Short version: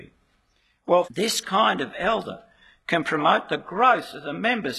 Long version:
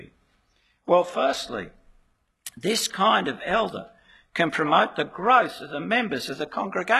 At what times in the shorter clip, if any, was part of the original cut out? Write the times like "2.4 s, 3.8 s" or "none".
1.0 s